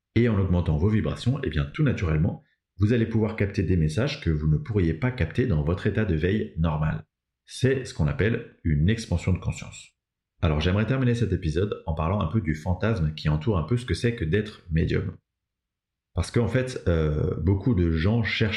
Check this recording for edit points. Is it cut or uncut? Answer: uncut